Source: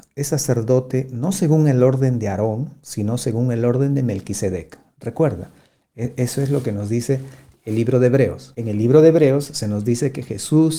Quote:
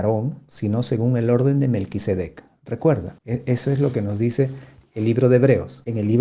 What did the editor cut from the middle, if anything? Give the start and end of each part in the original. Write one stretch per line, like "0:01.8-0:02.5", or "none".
0:05.5-0:05.9